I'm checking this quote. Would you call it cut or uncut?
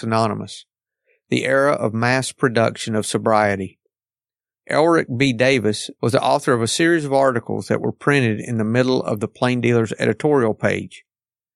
cut